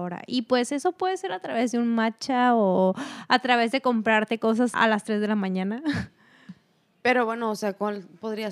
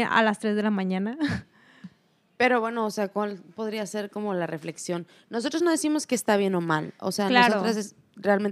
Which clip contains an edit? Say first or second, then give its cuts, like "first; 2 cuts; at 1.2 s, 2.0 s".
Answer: first; 1 cut; at 4.7 s